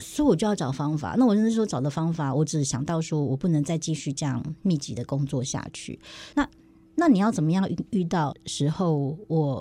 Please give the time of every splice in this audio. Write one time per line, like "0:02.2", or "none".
0:06.3
0:08.3